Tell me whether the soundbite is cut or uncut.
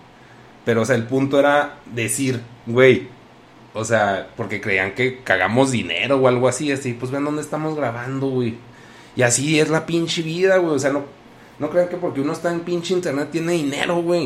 uncut